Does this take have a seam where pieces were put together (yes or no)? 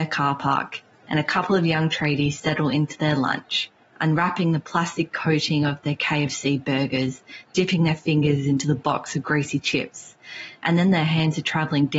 no